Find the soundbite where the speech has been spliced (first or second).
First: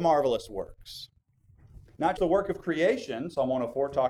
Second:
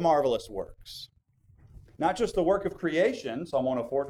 first